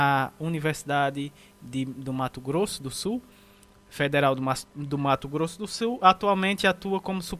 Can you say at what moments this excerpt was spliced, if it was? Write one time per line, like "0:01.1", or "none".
none